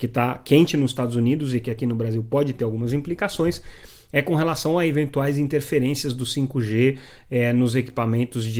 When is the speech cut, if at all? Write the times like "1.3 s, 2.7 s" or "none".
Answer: none